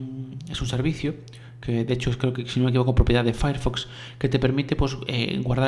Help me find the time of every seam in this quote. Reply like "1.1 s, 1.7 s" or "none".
none

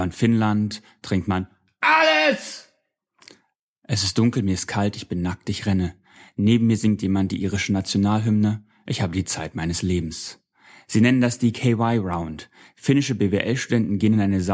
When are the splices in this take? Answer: none

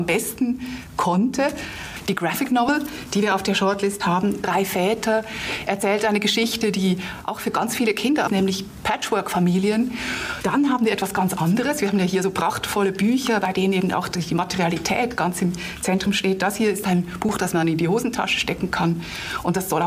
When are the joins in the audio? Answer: 8.3 s

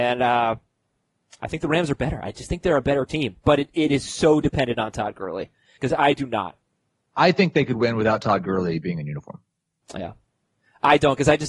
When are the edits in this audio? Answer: 5.8 s

